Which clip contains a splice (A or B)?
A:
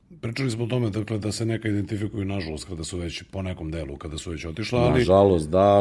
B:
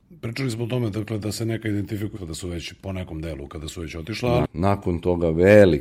B